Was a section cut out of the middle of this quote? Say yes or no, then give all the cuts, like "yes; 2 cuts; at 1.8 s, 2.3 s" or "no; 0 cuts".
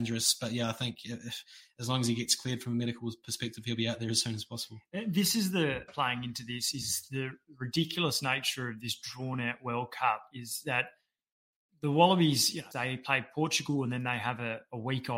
yes; 2 cuts; at 5.9 s, 12.7 s